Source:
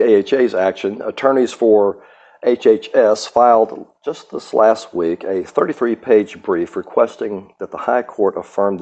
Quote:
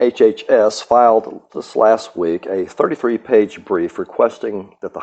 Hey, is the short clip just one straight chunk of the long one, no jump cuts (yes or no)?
no